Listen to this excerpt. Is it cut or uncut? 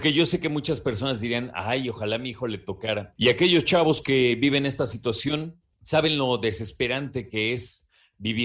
cut